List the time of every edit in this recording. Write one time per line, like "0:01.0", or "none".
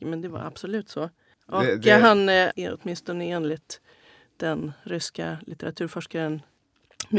0:02.5